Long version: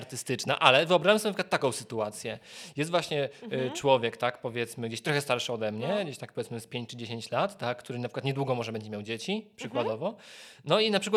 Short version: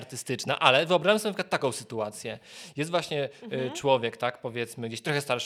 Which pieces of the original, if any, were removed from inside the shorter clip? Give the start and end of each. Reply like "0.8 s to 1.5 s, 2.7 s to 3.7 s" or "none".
none